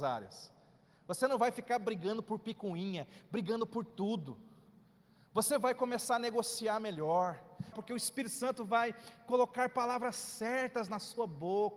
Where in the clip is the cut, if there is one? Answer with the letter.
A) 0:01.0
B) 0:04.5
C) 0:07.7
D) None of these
C